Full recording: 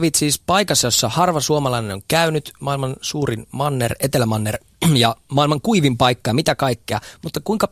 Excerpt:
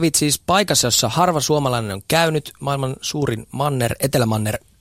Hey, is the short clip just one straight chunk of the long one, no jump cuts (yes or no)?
yes